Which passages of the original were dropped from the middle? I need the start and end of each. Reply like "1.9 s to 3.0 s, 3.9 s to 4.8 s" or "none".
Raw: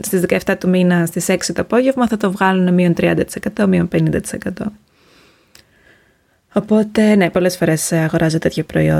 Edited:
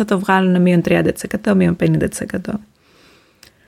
none